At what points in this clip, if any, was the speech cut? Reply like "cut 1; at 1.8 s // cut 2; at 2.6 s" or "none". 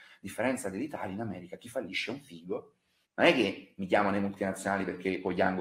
cut 1; at 3.0 s

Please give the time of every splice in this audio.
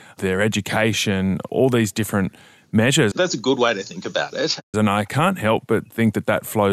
cut 1; at 3.1 s // cut 2; at 4.7 s

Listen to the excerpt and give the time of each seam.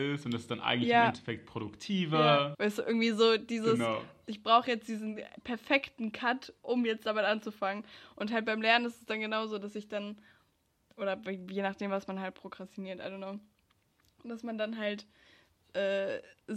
cut 1; at 2.5 s

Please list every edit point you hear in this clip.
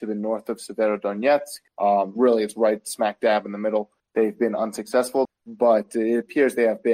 cut 1; at 1.7 s // cut 2; at 4.0 s // cut 3; at 5.3 s

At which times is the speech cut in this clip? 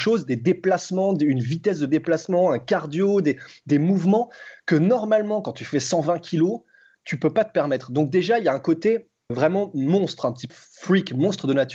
cut 1; at 9.3 s // cut 2; at 10.5 s

